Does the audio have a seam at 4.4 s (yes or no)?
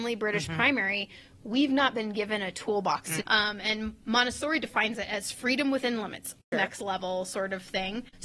no